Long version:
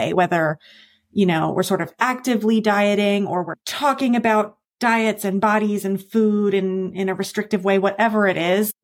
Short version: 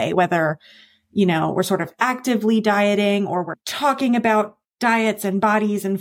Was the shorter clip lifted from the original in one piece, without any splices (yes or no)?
yes